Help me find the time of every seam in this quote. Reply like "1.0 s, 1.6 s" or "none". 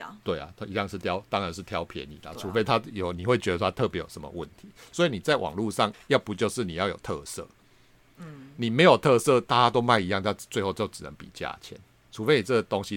5.9 s